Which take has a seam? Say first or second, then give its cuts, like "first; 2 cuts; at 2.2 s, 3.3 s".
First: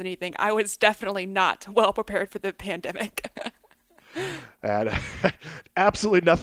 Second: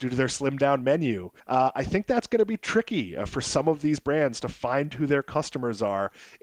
second; 1 cut; at 1.4 s